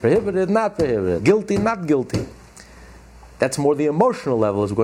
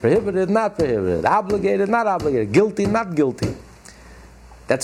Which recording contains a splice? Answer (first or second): first